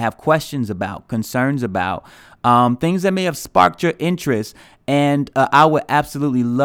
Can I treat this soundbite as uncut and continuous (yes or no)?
yes